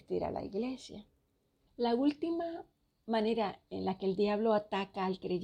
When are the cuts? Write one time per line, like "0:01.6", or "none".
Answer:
0:01.7